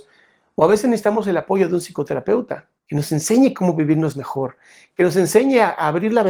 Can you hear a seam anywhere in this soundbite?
yes; 1 cut; at 2.8 s

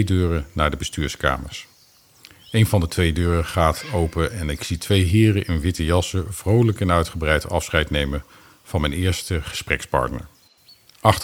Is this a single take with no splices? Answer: yes; 0 cuts

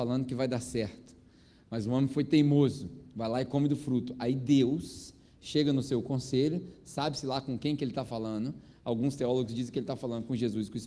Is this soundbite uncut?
yes; 0 cuts

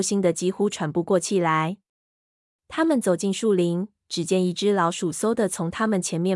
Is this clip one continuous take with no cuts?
yes; 0 cuts

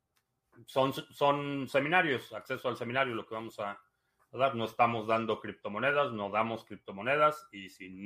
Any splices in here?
no; 0 cuts

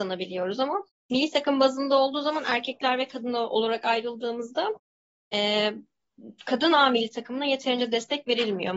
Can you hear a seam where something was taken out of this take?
no; 0 cuts

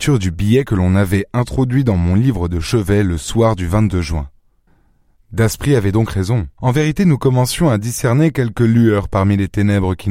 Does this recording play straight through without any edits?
no; 1 cut; at 6.6 s

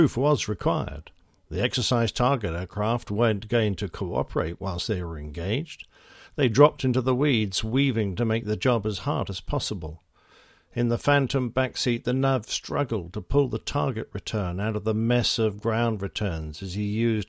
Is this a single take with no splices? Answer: yes; 0 cuts

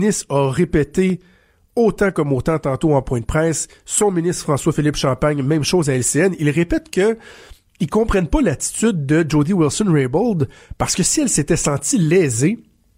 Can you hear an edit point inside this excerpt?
no; 0 cuts

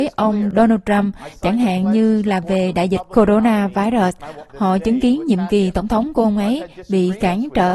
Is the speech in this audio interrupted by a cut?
yes; 1 cut; at 4.5 s

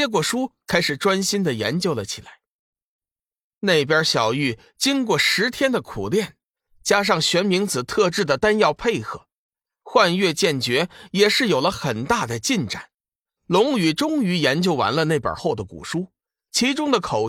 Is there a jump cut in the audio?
yes; 2 cuts; at 13.4 s, 15.4 s

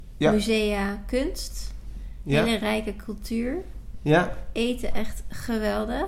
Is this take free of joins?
yes; 0 cuts

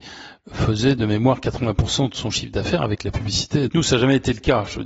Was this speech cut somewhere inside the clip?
yes; 1 cut; at 3.7 s

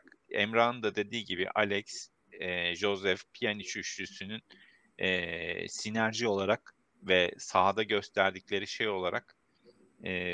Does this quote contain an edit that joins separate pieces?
no; 0 cuts

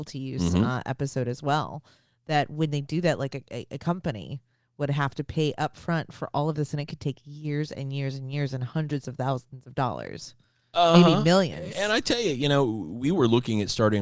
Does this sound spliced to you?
no; 0 cuts

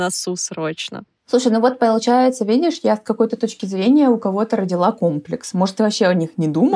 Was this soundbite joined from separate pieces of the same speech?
no; 0 cuts

